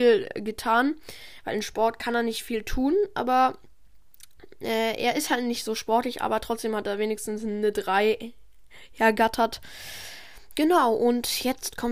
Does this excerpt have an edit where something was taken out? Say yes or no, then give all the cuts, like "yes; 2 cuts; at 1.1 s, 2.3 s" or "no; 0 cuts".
no; 0 cuts